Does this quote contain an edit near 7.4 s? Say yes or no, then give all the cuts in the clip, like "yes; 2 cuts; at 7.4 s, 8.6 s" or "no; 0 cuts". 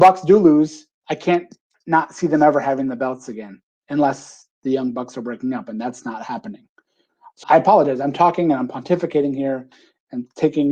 yes; 1 cut; at 7.4 s